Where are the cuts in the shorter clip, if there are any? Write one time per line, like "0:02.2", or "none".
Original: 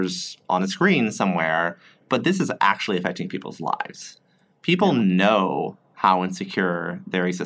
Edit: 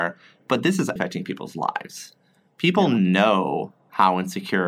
0:01.0